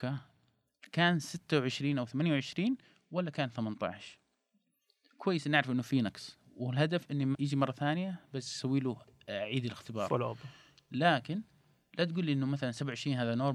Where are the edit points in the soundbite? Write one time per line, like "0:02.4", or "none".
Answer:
0:07.3